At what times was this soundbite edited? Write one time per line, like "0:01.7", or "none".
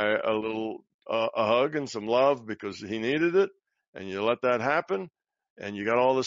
none